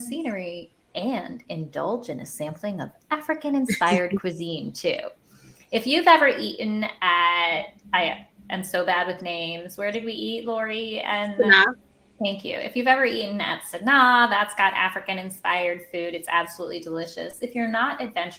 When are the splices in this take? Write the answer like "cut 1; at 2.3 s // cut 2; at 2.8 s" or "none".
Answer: none